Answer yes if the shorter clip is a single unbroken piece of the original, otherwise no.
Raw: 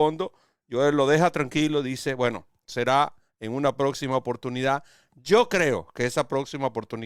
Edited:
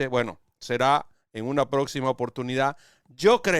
yes